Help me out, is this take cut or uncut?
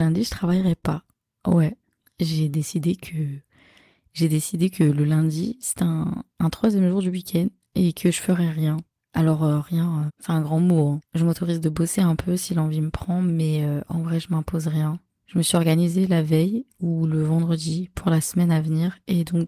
cut